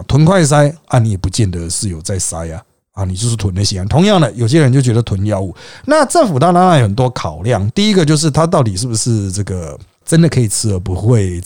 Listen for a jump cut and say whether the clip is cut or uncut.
uncut